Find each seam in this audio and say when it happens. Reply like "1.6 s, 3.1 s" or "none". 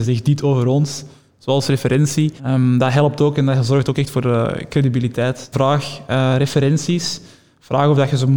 2.4 s, 5.5 s